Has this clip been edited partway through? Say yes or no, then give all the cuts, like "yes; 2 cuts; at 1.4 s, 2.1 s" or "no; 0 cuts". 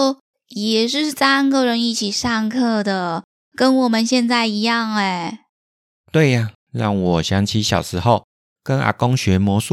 yes; 1 cut; at 6.6 s